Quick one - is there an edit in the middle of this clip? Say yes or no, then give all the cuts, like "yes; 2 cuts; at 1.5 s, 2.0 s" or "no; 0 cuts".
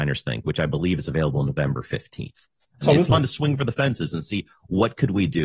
yes; 1 cut; at 2.8 s